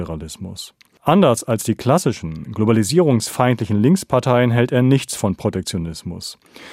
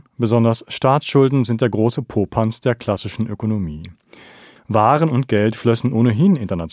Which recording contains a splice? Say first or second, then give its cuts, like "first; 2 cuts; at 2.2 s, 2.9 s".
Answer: second; 1 cut; at 4.6 s